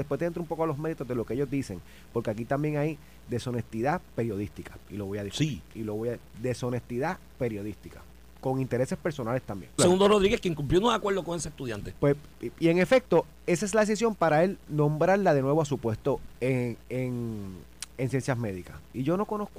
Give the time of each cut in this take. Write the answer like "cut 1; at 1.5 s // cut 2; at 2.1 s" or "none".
cut 1; at 9.8 s

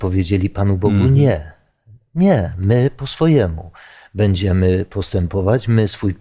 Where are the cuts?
none

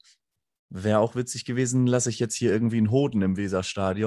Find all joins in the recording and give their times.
none

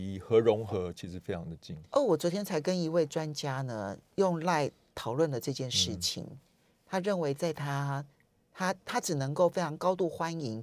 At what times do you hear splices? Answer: cut 1; at 1.9 s

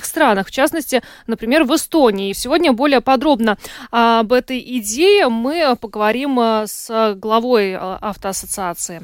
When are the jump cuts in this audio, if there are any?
cut 1; at 2.3 s

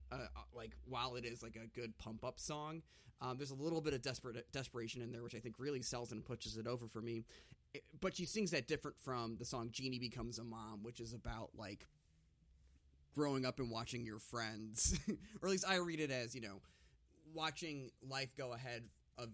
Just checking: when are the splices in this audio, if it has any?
none

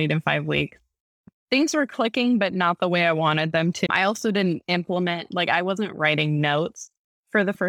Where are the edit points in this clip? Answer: cut 1; at 3.9 s

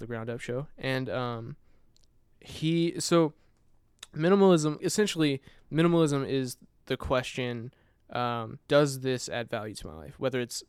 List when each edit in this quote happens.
cut 1; at 4.8 s // cut 2; at 8.6 s

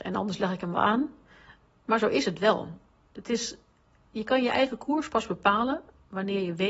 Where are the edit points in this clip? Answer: none

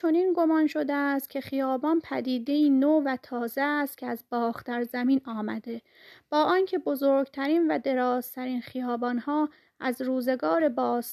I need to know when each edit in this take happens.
none

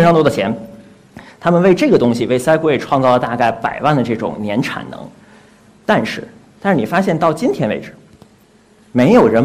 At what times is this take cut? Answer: none

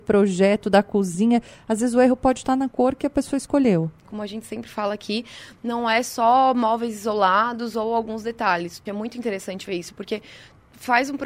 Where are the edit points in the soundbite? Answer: cut 1; at 4.0 s // cut 2; at 8.9 s

